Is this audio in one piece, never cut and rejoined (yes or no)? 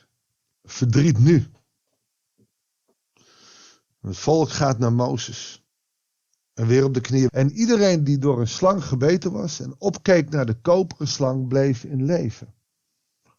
no